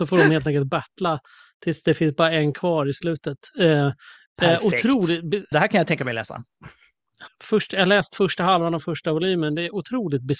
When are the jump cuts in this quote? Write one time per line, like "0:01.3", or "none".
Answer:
0:05.5
0:07.3